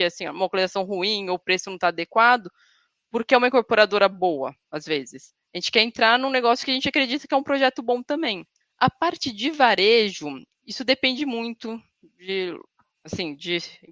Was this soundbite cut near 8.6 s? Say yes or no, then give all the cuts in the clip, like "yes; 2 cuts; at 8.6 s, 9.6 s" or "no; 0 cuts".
yes; 1 cut; at 8.6 s